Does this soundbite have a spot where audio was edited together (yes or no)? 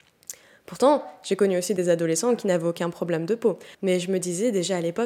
yes